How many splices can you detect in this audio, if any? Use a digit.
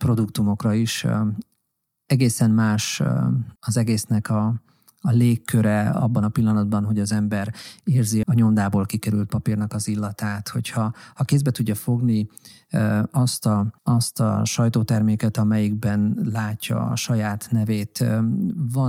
3